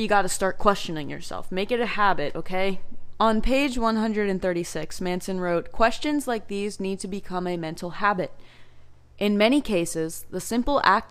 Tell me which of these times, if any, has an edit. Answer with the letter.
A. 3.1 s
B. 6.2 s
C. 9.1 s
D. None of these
A